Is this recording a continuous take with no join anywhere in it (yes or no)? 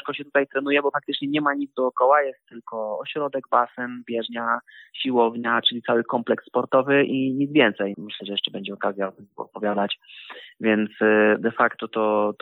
no